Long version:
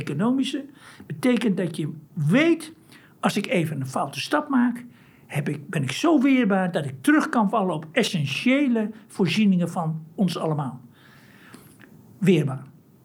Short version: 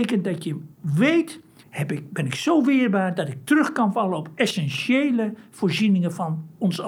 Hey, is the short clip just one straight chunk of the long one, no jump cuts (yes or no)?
no